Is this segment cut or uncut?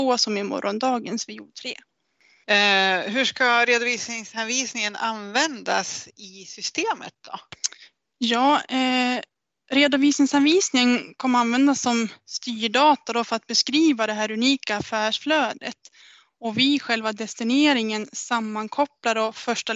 uncut